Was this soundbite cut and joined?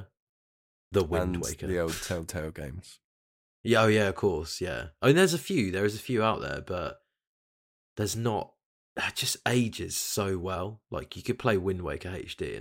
no; 0 cuts

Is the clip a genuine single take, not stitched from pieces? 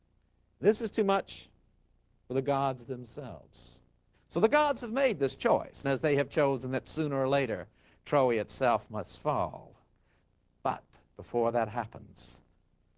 no; 2 cuts; at 4.1 s, 5.8 s

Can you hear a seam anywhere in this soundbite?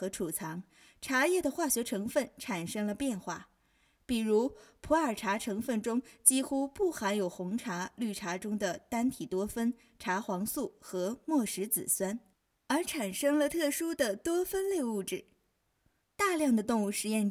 no; 0 cuts

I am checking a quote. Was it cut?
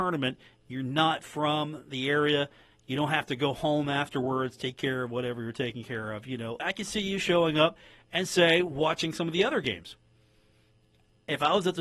yes; 1 cut; at 6.6 s

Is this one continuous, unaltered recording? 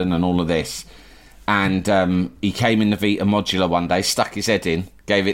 yes; 0 cuts

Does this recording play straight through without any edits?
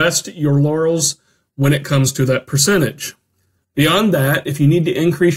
no; 1 cut; at 3.6 s

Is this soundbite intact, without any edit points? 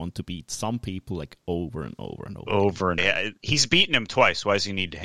no; 1 cut; at 3.0 s

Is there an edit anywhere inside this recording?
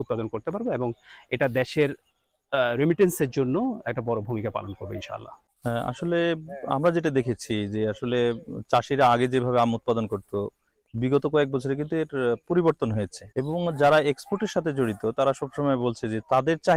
yes; 1 cut; at 13.3 s

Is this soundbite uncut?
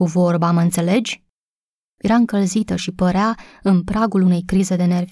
no; 1 cut; at 1.9 s

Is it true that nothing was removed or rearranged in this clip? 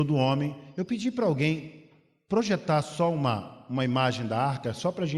yes; 0 cuts

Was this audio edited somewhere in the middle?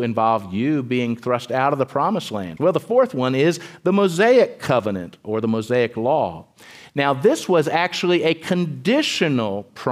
yes; 1 cut; at 2.6 s

